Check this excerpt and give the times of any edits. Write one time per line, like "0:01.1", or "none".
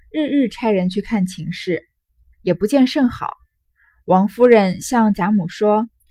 0:02.3